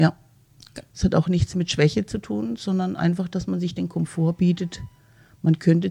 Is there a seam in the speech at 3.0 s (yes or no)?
no